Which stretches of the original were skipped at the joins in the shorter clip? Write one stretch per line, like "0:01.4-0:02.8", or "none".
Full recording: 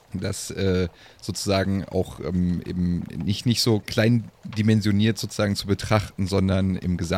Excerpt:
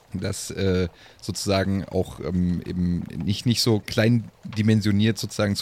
none